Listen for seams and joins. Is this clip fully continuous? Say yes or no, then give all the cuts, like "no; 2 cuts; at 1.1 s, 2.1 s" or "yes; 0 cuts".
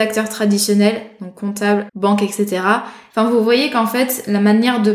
no; 2 cuts; at 1.9 s, 3.1 s